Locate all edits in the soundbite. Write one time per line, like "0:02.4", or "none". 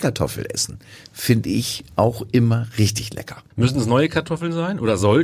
0:03.5

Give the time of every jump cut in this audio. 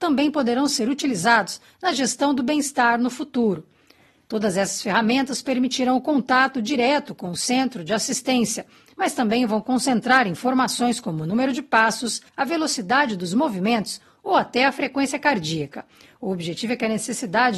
0:12.3

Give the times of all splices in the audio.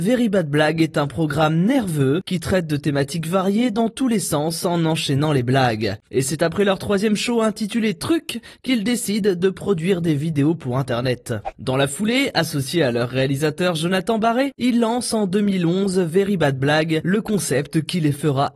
0:06.0
0:11.5

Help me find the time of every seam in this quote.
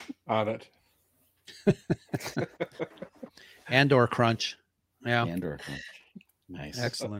none

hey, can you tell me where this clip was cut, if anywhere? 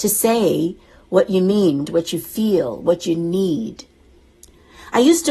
0:01.8

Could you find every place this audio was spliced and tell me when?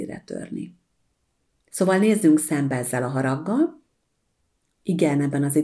none

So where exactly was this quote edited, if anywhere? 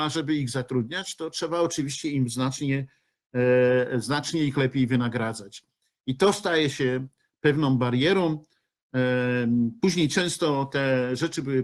0:09.8

